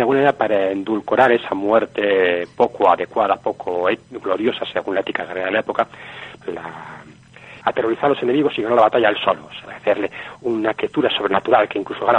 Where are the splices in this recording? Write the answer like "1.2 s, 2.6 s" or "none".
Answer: 6.4 s, 7.6 s, 9.7 s